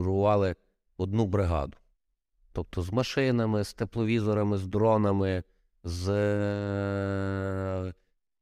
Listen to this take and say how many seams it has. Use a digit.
0